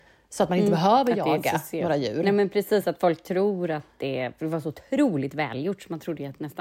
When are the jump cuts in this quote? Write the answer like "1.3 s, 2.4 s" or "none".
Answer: none